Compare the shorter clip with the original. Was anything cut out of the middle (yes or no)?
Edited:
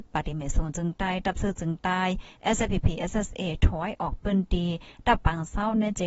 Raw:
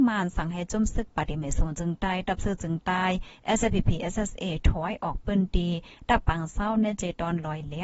no